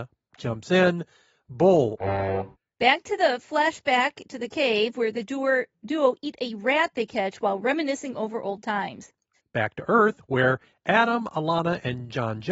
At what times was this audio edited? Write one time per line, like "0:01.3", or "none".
0:02.7
0:09.4